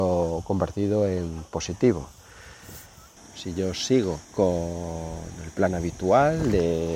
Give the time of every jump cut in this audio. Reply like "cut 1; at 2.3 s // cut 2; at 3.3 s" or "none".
cut 1; at 3.2 s // cut 2; at 4.2 s